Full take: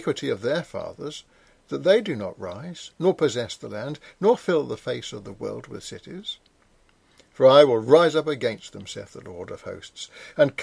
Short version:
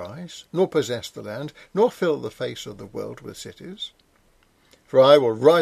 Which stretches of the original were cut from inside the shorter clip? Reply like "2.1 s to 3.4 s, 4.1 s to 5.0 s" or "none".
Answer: none